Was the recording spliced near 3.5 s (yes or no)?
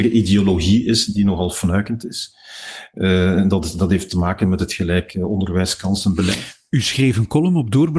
no